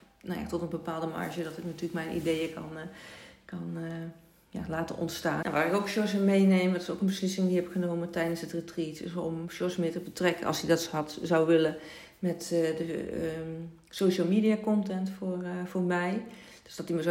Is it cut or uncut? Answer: cut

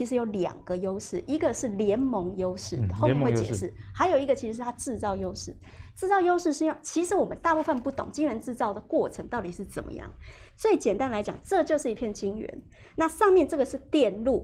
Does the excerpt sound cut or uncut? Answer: uncut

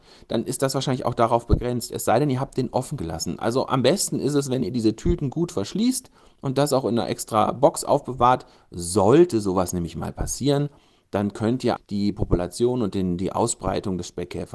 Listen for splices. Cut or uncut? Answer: cut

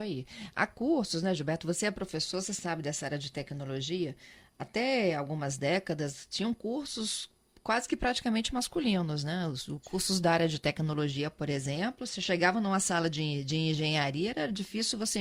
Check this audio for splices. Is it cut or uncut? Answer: uncut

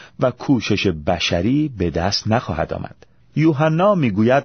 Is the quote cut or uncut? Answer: cut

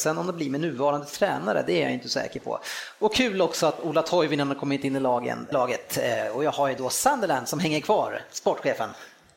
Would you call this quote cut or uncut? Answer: cut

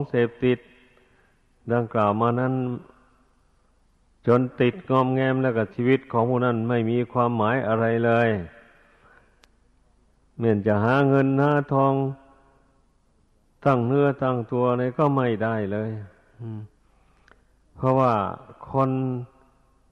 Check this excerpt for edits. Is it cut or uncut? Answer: uncut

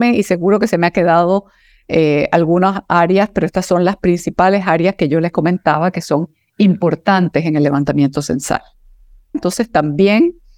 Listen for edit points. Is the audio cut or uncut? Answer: cut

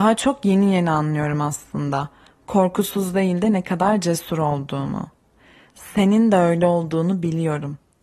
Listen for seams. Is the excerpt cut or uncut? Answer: uncut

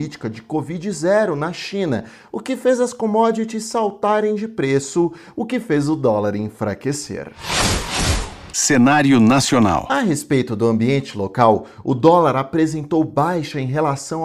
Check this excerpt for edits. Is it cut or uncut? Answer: uncut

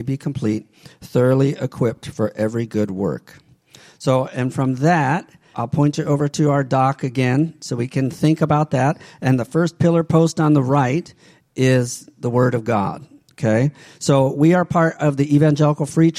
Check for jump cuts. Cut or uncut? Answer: cut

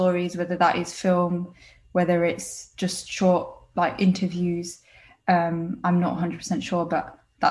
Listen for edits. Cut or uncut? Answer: uncut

